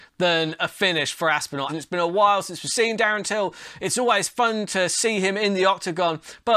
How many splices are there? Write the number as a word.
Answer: one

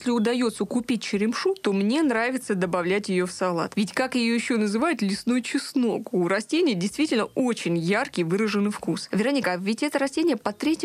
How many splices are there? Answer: zero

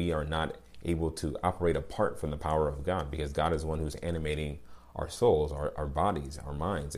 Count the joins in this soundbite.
zero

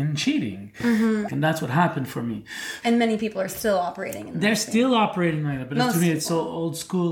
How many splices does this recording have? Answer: two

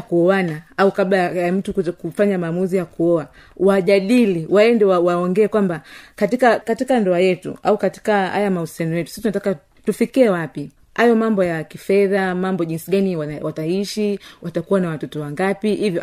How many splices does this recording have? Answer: one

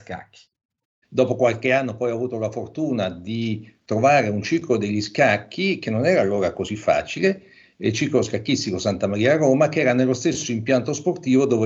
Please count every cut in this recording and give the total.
one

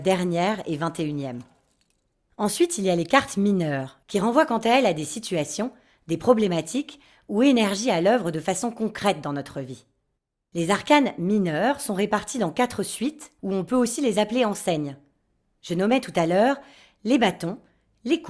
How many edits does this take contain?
one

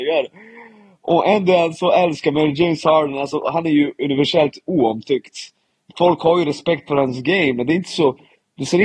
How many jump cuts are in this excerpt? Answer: zero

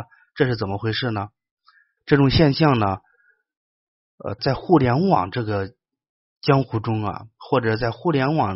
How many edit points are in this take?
two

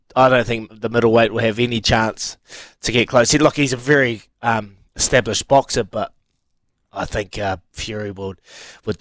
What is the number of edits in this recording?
zero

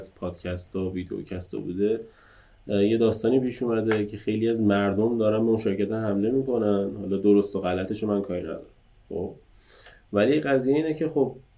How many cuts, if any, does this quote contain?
zero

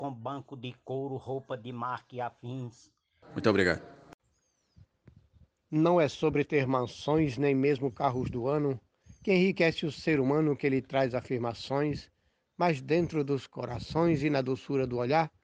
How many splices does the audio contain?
one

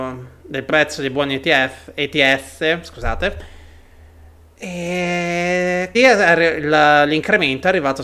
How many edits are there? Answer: one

